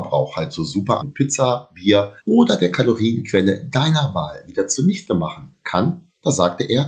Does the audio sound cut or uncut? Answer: cut